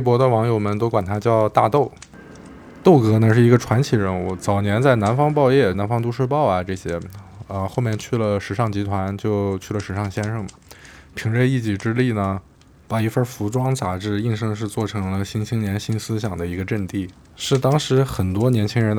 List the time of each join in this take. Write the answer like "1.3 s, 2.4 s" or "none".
5.7 s, 14.4 s